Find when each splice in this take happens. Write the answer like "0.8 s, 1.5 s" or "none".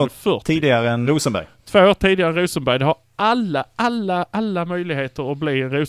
1.0 s